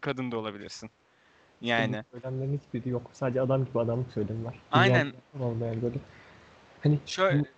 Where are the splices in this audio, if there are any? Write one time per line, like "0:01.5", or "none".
0:04.6